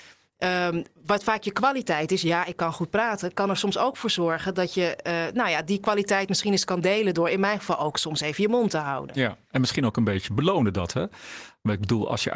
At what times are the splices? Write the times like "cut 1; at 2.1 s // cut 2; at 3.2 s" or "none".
none

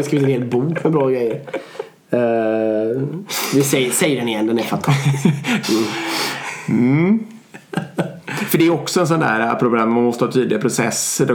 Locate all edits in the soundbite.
cut 1; at 5.6 s

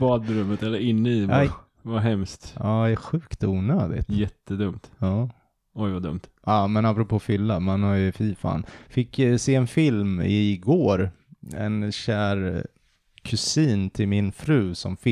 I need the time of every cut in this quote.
cut 1; at 1.4 s

